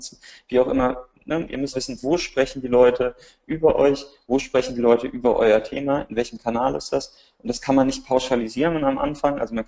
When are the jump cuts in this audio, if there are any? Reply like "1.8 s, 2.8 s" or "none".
1.7 s